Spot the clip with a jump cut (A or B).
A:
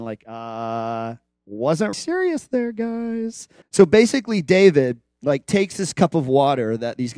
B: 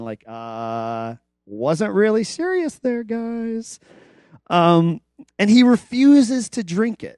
A